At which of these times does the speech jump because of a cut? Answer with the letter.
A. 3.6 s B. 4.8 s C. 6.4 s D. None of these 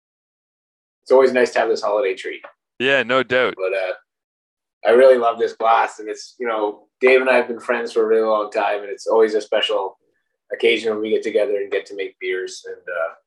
A